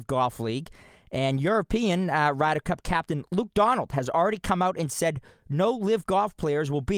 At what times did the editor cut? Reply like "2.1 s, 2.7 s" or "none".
none

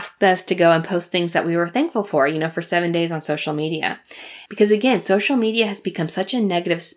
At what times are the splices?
4.5 s

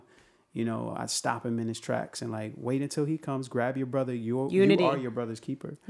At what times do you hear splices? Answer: none

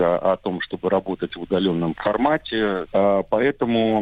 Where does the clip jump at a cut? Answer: 2.9 s

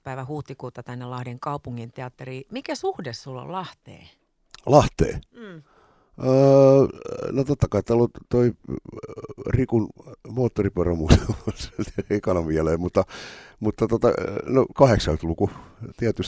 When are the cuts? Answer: none

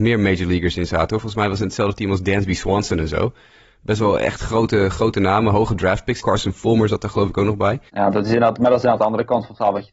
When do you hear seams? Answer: 6.2 s, 7.9 s

